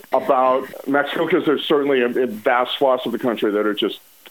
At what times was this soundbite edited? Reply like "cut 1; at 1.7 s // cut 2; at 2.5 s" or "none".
none